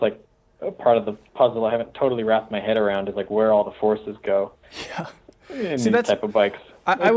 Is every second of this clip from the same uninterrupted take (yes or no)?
yes